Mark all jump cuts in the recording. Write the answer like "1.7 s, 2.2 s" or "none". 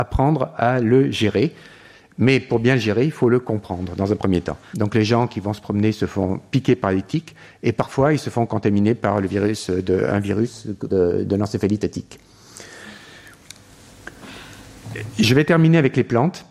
4.7 s, 10.9 s